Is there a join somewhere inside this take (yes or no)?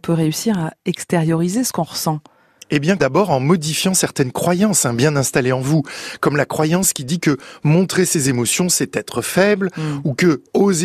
yes